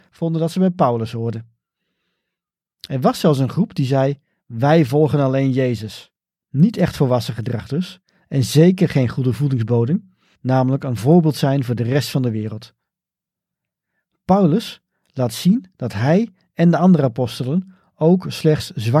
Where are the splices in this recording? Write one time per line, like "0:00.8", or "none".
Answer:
0:06.4
0:10.4